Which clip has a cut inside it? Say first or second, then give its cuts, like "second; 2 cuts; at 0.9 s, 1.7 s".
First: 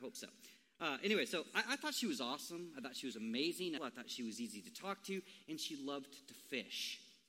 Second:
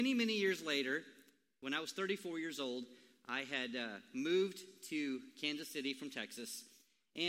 first; 1 cut; at 3.8 s